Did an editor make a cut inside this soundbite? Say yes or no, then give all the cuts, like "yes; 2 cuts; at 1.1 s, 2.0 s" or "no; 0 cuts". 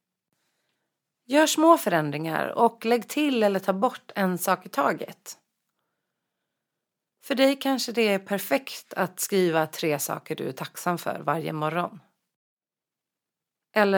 no; 0 cuts